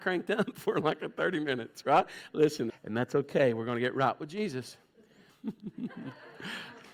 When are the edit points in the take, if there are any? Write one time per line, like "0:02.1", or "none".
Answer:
0:02.7
0:05.3